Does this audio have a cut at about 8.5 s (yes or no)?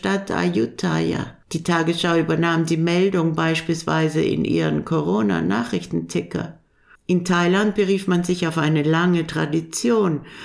no